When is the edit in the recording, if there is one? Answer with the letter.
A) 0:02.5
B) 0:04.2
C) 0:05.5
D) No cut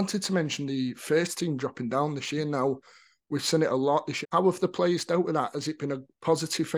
B